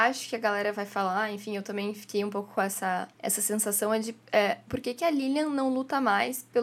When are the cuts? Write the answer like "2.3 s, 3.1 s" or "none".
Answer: 3.1 s, 4.7 s